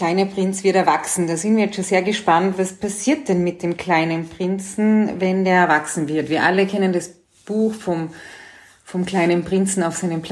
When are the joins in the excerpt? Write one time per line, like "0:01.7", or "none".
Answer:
0:02.5